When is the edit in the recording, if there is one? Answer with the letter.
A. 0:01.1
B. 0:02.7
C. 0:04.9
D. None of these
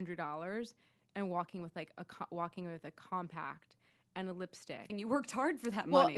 C